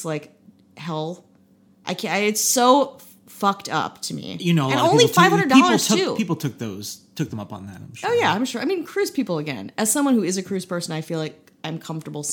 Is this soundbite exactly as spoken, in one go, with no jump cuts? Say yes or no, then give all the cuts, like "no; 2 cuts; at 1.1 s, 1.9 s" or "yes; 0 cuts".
yes; 0 cuts